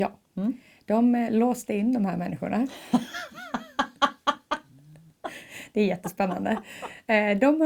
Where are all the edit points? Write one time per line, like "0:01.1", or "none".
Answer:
none